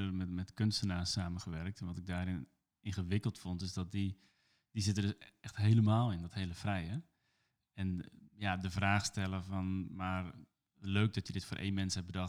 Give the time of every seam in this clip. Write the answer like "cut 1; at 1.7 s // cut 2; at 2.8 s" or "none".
none